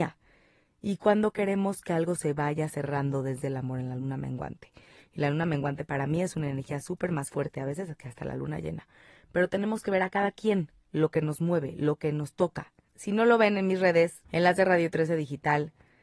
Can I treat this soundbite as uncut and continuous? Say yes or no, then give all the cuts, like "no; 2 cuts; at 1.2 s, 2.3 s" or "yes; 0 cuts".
no; 2 cuts; at 12.9 s, 14.3 s